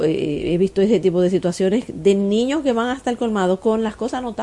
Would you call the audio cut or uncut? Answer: uncut